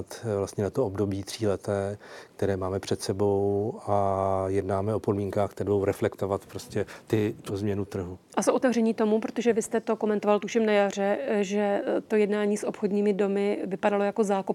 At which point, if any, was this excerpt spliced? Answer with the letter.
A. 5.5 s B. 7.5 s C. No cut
B